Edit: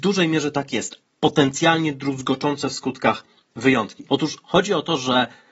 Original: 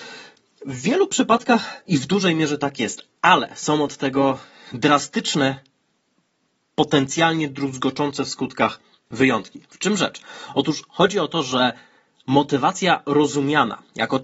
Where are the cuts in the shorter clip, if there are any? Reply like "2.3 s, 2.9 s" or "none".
1.0 s, 4.1 s